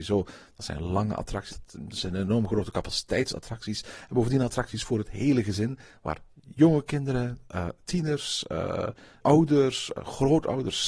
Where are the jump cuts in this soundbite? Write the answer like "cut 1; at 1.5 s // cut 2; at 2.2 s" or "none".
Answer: cut 1; at 1.5 s // cut 2; at 9.2 s